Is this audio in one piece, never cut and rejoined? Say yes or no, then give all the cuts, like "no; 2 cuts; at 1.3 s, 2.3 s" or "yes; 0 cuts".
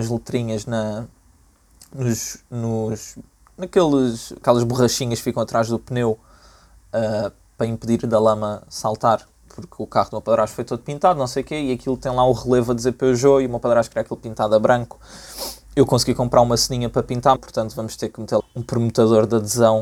no; 2 cuts; at 17.4 s, 18.4 s